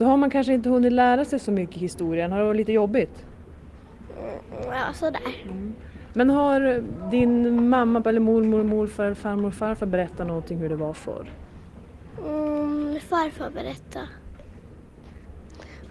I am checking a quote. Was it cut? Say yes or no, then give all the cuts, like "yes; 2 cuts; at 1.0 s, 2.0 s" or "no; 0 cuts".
yes; 1 cut; at 8.0 s